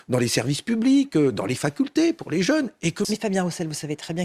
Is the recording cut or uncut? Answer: cut